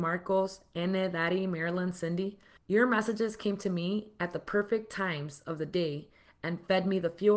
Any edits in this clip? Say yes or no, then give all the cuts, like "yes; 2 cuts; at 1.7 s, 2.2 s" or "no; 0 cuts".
no; 0 cuts